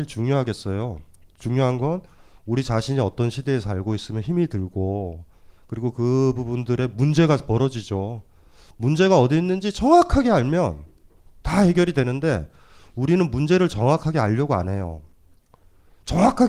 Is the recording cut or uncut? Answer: uncut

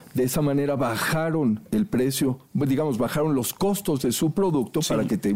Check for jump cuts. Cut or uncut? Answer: uncut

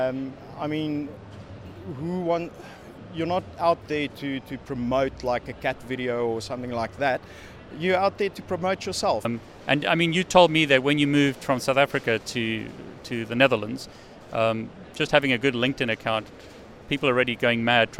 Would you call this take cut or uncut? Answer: cut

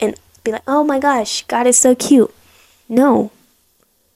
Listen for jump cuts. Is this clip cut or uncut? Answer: cut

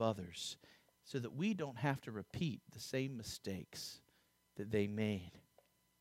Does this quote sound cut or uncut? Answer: uncut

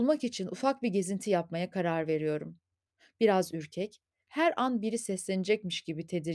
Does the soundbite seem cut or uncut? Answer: uncut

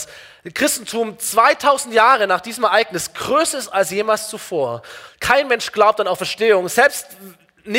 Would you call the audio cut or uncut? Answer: cut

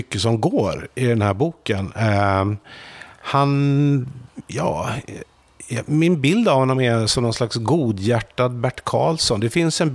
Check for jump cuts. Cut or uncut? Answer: uncut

